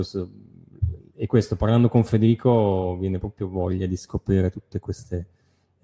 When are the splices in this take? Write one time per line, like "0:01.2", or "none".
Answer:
none